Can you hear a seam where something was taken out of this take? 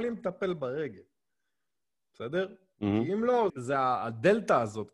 yes; 1 cut; at 3.5 s

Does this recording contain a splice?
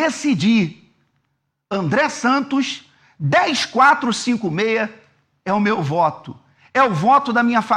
no; 0 cuts

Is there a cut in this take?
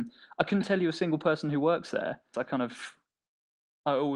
yes; 1 cut; at 2.3 s

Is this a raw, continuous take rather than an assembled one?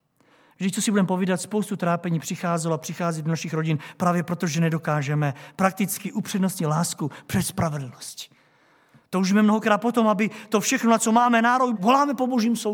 no; 1 cut; at 11.7 s

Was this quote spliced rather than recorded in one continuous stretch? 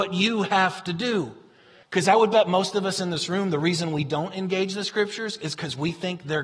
yes; 1 cut; at 1.8 s

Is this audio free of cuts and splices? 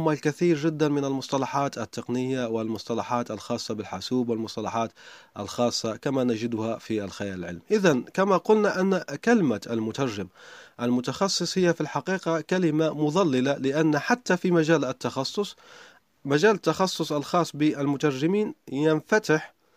yes; 0 cuts

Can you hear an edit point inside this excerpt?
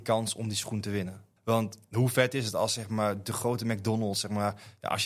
yes; 1 cut; at 1.4 s

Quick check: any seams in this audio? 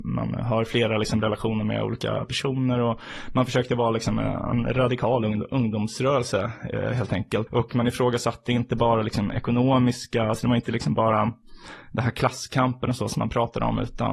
yes; 1 cut; at 7.5 s

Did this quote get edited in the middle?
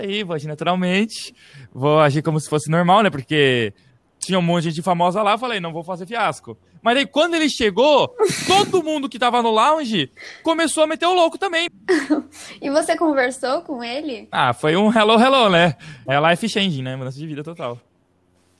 yes; 2 cuts; at 11.7 s, 16.1 s

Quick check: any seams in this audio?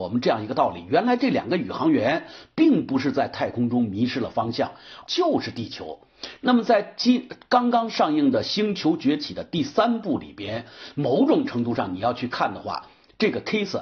yes; 2 cuts; at 5.0 s, 6.4 s

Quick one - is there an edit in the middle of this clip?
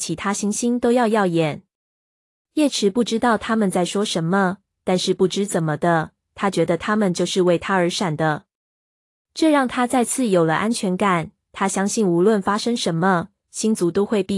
no; 0 cuts

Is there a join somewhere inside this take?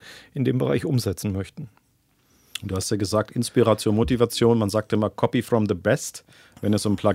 no; 0 cuts

